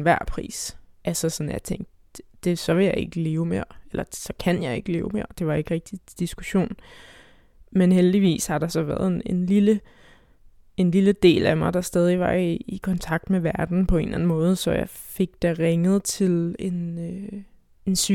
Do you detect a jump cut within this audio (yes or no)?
no